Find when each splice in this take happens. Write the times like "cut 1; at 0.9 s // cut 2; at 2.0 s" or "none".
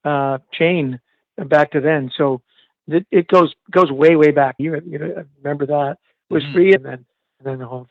cut 1; at 4.6 s // cut 2; at 6.8 s